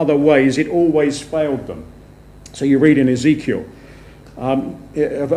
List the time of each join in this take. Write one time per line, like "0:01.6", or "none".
none